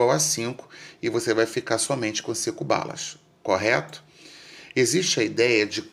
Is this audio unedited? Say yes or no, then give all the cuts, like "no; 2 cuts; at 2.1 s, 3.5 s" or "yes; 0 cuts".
yes; 0 cuts